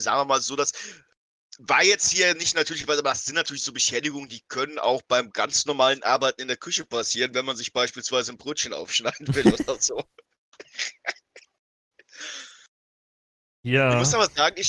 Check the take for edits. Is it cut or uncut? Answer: uncut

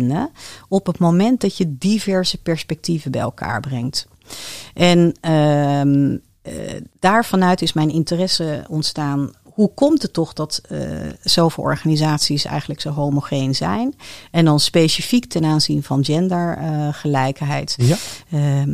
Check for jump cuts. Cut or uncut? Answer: cut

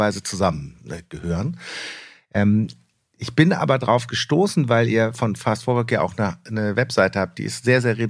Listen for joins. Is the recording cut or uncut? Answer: uncut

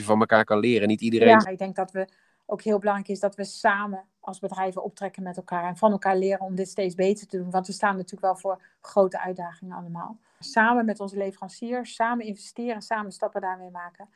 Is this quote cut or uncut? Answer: cut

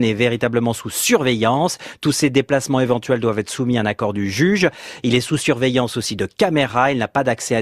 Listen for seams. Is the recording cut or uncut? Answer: uncut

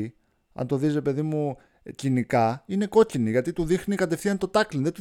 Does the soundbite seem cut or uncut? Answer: uncut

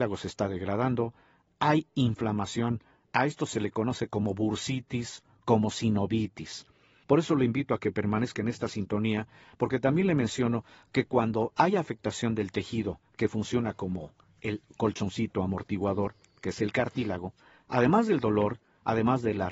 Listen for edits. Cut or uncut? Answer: cut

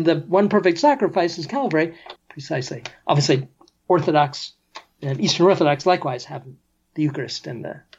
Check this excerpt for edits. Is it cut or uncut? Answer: cut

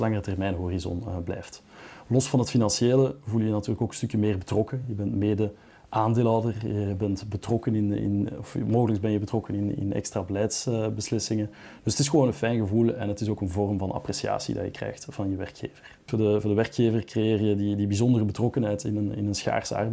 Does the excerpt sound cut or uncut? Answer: uncut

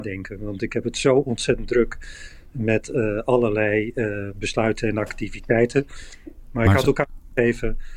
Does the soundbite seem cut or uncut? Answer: cut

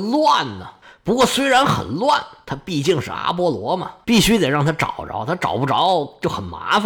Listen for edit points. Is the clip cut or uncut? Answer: uncut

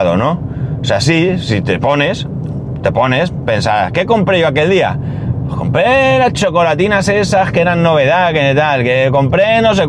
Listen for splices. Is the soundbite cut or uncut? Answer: uncut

